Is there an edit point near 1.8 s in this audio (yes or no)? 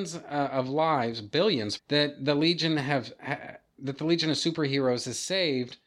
yes